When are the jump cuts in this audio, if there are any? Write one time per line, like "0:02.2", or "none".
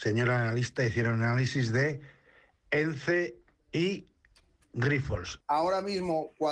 0:05.4